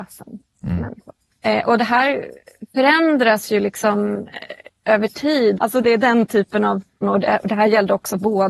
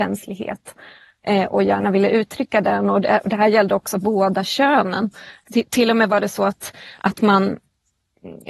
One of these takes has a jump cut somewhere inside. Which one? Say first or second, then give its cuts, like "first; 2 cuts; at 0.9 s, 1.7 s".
first; 2 cuts; at 5.6 s, 7.0 s